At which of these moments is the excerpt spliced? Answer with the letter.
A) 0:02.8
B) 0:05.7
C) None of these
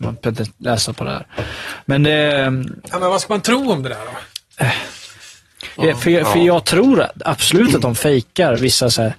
B